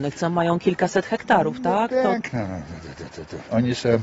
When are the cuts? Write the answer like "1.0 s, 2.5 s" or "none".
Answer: none